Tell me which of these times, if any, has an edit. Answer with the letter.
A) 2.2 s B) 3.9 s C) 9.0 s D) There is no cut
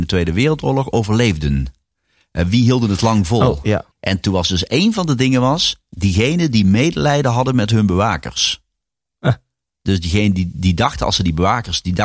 B